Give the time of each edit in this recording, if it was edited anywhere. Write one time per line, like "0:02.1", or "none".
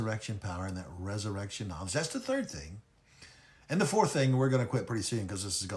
none